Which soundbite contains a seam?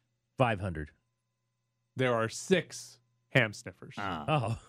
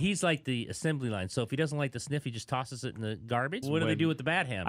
second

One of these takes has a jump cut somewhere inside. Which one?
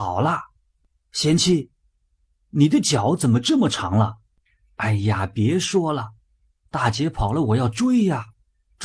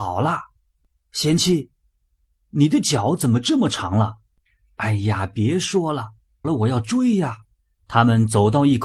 second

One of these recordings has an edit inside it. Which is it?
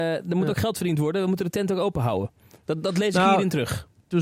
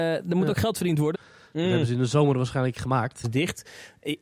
second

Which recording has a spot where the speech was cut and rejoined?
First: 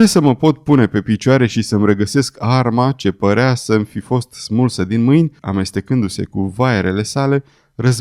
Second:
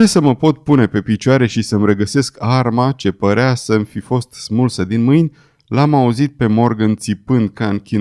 first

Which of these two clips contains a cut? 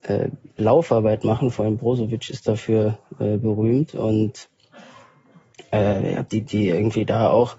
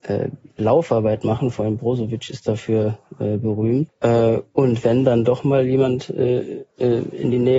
second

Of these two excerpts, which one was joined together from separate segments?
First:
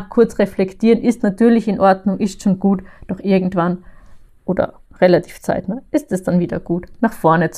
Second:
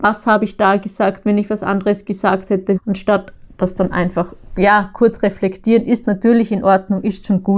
second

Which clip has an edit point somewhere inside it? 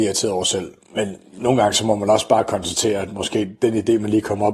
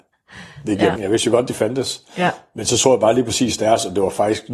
second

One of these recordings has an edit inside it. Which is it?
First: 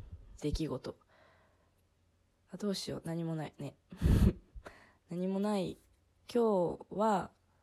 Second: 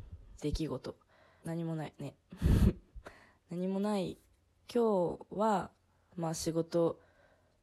second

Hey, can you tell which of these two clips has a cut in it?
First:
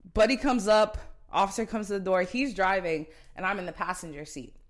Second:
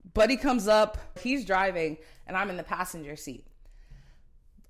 second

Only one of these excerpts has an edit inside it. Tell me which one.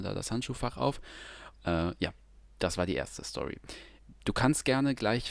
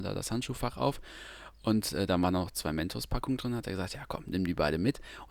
first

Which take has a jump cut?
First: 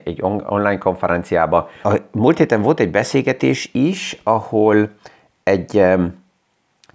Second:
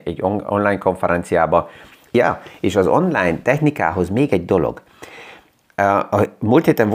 first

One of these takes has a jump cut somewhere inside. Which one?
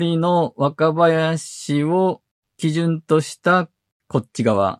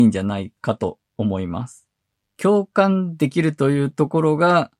second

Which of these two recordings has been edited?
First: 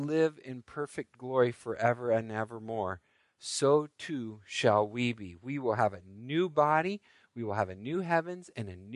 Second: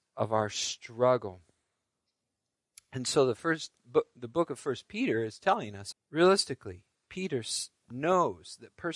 second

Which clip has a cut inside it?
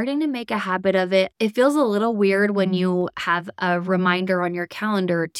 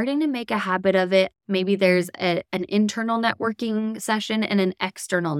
second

